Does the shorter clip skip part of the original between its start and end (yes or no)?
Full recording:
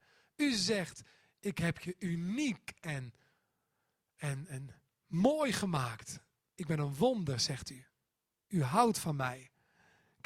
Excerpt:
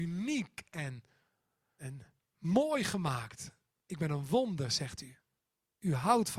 yes